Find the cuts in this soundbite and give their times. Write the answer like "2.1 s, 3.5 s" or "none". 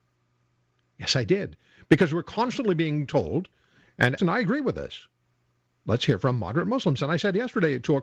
4.2 s